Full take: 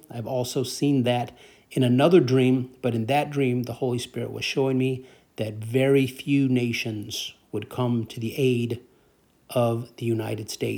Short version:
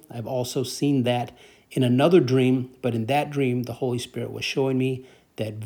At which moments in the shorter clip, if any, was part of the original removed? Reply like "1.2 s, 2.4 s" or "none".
none